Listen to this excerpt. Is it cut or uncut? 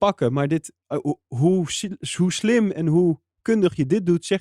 uncut